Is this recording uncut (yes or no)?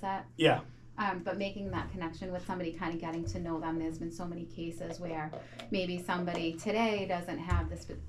yes